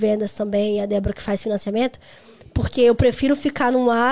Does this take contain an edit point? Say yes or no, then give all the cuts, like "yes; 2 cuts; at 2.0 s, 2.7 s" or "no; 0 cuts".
no; 0 cuts